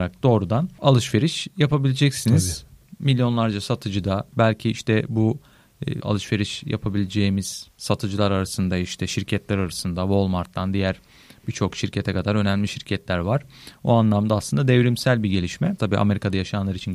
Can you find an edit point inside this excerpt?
yes; 2 cuts; at 6.0 s, 15.8 s

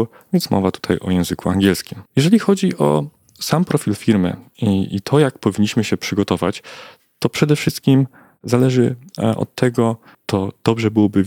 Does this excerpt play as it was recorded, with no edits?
no; 2 cuts; at 2.1 s, 10.1 s

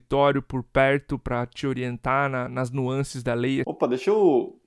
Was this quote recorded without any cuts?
no; 1 cut; at 3.6 s

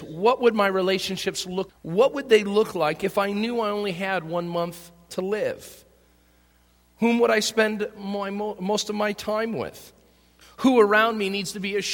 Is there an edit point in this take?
yes; 2 cuts; at 1.7 s, 10.4 s

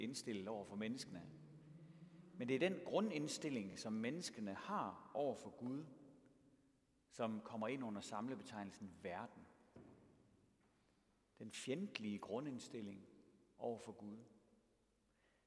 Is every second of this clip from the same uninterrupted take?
yes; 0 cuts

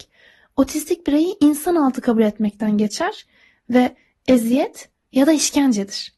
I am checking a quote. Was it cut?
no; 0 cuts

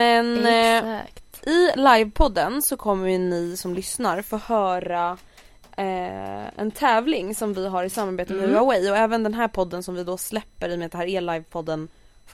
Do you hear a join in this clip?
no; 0 cuts

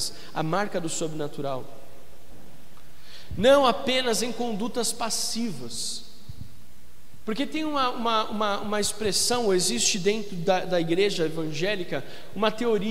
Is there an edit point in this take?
no; 0 cuts

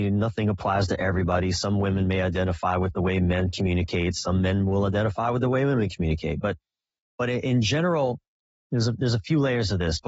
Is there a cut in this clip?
no; 0 cuts

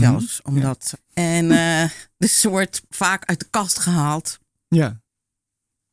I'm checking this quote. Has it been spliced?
yes; 2 cuts; at 0.9 s, 2.9 s

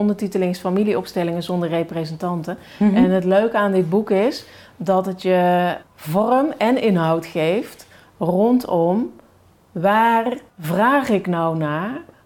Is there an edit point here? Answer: yes; 2 cuts; at 5.8 s, 10.5 s

